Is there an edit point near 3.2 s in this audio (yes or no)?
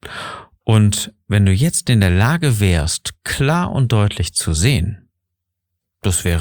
no